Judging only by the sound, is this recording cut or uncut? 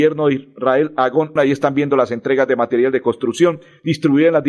cut